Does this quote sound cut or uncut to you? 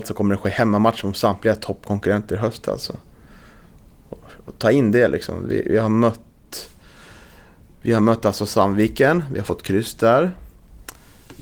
uncut